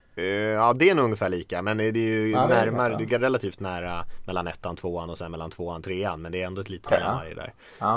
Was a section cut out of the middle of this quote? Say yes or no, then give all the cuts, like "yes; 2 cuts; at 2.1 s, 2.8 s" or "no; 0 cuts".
yes; 1 cut; at 6.9 s